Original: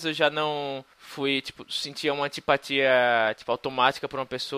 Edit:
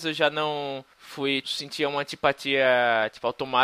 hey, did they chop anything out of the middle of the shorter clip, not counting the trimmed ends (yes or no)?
yes